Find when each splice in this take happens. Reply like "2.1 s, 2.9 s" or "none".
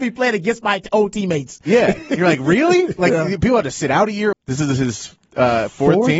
3.0 s, 4.3 s